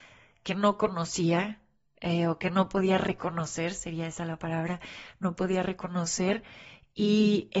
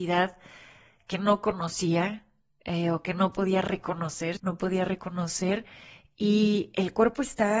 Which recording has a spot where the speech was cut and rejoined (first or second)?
second